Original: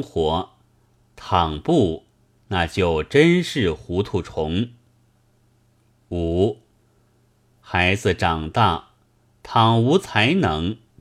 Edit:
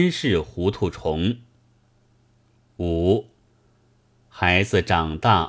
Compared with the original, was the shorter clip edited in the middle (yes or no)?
no